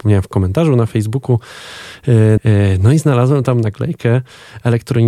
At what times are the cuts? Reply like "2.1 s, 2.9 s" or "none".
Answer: 2.4 s